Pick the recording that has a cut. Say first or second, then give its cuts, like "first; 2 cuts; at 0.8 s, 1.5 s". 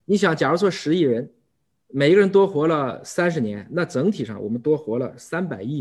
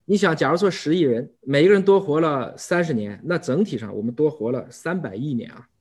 second; 1 cut; at 1.3 s